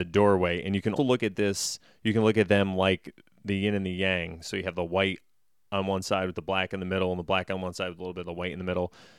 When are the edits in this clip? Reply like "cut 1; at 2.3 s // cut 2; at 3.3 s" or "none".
cut 1; at 1.0 s